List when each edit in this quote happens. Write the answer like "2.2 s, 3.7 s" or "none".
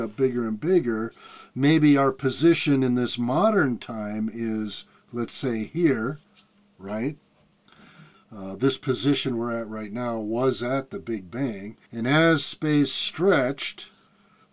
8.1 s, 11.8 s